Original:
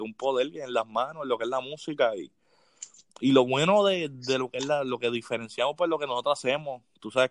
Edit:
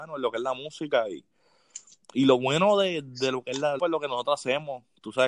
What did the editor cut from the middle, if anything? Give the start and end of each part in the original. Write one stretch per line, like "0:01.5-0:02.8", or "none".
0:04.8-0:05.8